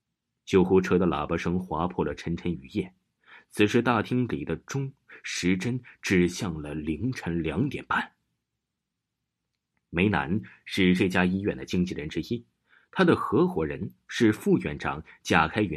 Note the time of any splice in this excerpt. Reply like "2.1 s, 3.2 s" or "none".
none